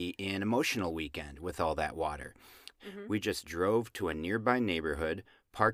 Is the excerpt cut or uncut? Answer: cut